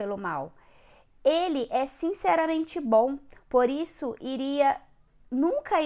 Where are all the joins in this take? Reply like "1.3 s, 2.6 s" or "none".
none